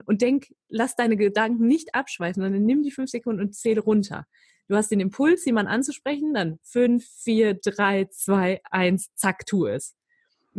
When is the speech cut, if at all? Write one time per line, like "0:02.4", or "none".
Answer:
none